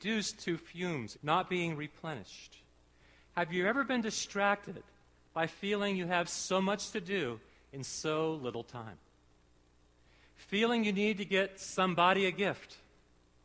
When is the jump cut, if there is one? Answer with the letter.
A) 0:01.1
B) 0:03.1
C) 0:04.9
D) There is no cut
A